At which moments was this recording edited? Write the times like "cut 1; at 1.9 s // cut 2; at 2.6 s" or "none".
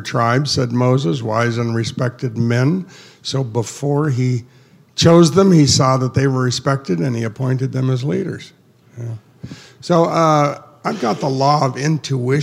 none